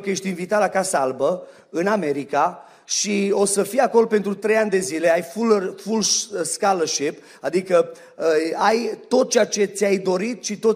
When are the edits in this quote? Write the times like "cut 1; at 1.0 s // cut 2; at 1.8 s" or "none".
none